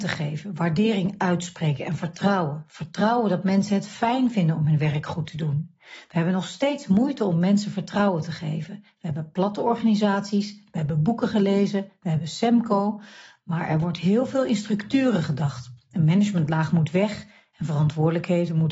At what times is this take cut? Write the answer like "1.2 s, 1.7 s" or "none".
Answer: none